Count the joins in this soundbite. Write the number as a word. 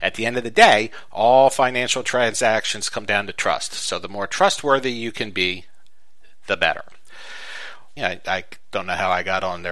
one